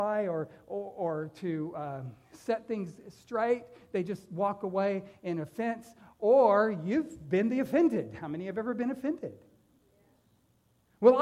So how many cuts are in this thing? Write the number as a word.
zero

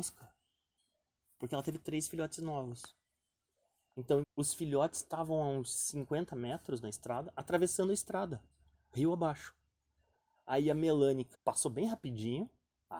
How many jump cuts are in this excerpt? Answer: two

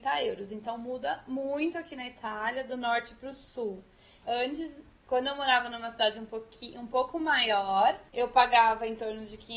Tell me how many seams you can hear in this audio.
one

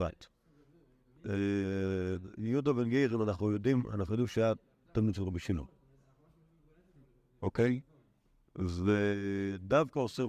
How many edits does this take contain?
zero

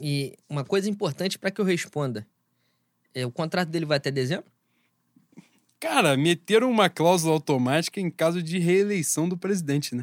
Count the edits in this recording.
zero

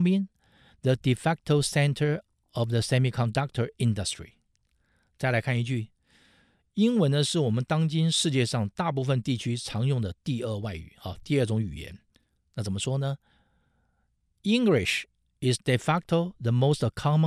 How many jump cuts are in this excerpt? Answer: zero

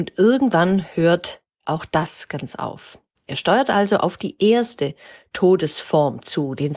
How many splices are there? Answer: zero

